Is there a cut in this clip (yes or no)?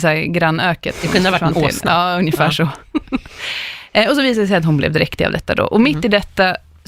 no